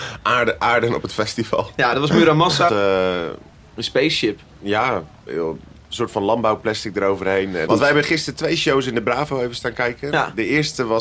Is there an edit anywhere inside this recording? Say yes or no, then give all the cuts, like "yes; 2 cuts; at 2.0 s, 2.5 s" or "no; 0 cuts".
yes; 2 cuts; at 2.7 s, 7.7 s